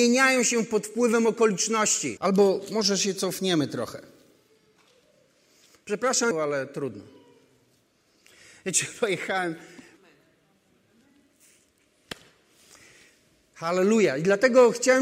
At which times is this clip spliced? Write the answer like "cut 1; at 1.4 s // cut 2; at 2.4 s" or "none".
cut 1; at 2.2 s // cut 2; at 6.3 s // cut 3; at 10.0 s